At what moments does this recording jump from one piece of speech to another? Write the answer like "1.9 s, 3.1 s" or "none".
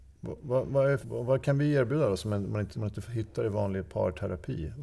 1.0 s, 2.7 s